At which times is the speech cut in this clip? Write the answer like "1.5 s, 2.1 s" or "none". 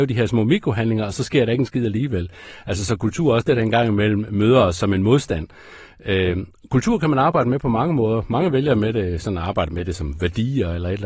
none